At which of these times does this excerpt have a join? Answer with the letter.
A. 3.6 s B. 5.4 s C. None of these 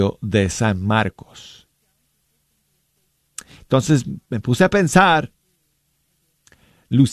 A